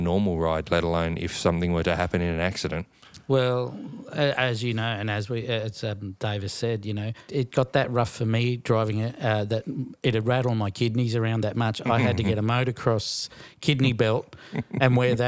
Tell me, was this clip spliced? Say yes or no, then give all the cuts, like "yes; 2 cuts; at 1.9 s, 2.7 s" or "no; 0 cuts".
yes; 1 cut; at 7.3 s